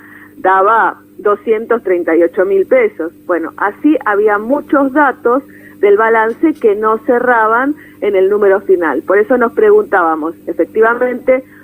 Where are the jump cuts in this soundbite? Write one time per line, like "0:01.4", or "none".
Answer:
none